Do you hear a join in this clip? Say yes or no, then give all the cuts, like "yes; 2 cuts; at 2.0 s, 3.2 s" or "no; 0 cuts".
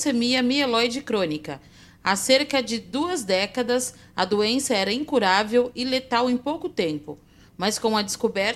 no; 0 cuts